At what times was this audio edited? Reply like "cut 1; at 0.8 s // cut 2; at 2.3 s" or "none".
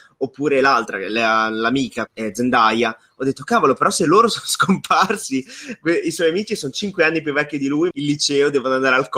cut 1; at 2.1 s // cut 2; at 7.9 s